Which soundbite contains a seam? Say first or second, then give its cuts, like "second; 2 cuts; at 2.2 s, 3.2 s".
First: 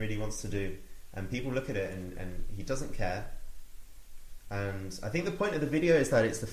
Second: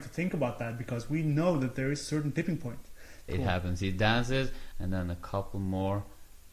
second; 2 cuts; at 3.3 s, 4.7 s